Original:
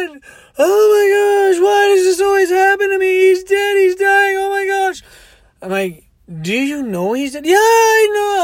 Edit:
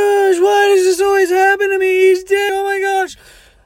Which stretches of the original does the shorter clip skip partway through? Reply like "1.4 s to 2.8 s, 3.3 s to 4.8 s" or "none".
3.7 s to 4.3 s

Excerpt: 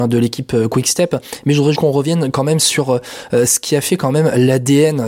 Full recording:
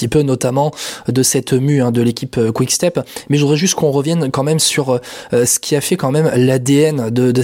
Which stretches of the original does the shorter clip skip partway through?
3.6 s to 3.7 s

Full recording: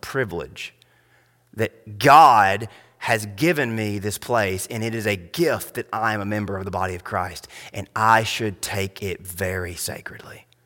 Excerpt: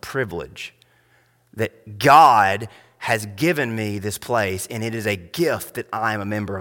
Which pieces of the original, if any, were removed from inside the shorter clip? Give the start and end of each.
none

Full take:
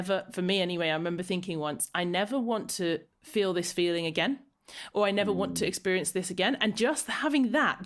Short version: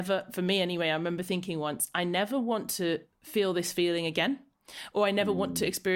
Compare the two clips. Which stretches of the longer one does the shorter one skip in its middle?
none

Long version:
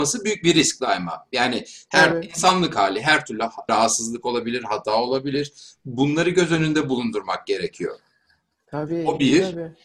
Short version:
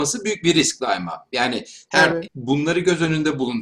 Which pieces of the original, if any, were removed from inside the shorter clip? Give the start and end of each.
2.3 s to 5.8 s

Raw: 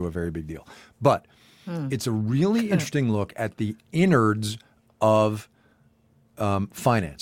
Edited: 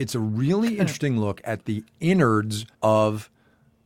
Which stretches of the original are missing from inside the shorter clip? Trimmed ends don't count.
4.7 s to 4.9 s

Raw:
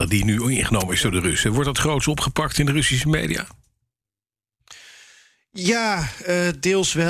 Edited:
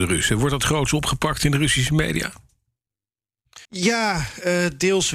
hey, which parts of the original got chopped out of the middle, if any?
4.8 s to 5.5 s

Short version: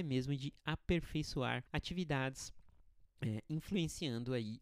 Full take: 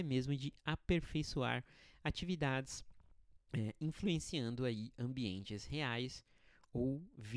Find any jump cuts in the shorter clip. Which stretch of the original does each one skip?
1.7 s to 2.0 s

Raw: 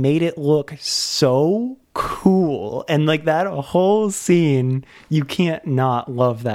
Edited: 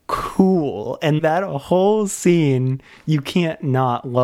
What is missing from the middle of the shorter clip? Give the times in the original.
3.0 s to 3.2 s

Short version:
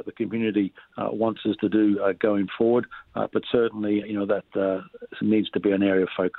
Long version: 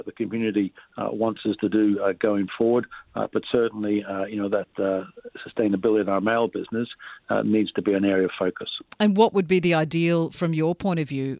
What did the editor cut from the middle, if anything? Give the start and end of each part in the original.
4.0 s to 4.3 s, 5.4 s to 7.4 s

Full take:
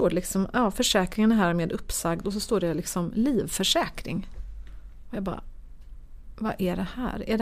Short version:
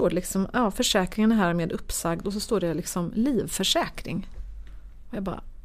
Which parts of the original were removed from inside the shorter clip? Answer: none

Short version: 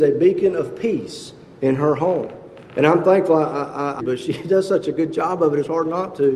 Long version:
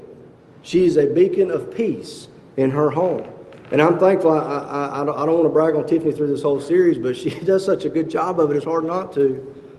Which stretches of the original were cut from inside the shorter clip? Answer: 4.9 s to 7.0 s

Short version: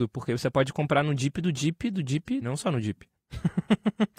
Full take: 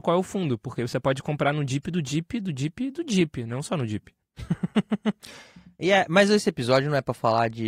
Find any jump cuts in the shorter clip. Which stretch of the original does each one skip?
2.9 s to 3.5 s

